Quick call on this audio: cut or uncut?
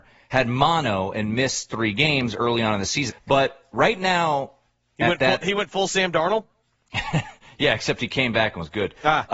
cut